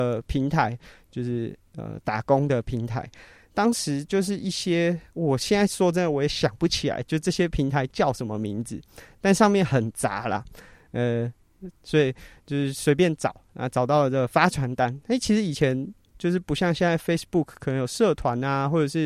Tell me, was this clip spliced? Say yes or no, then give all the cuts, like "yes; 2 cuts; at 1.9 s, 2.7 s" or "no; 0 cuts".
yes; 1 cut; at 11.8 s